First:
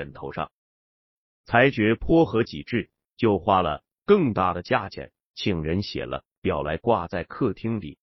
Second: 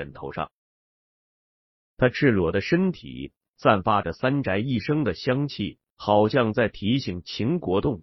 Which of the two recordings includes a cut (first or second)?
first